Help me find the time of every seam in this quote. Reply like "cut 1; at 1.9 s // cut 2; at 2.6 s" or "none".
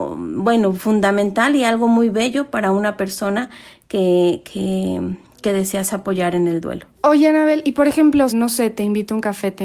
cut 1; at 6.9 s // cut 2; at 8.3 s